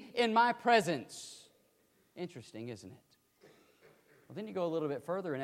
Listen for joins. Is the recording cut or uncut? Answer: uncut